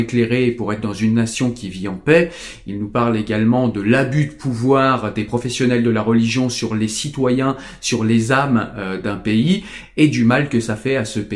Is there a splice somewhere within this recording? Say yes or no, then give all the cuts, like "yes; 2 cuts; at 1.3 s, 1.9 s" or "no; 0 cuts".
no; 0 cuts